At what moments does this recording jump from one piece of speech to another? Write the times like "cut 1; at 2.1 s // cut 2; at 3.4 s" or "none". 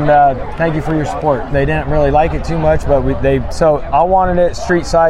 cut 1; at 1.5 s // cut 2; at 3.5 s